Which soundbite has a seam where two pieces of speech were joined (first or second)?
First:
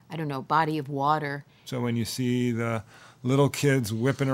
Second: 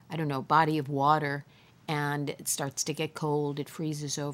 first